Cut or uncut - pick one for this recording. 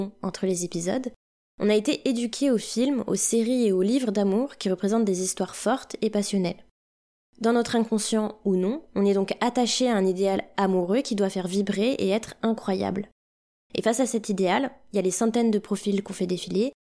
uncut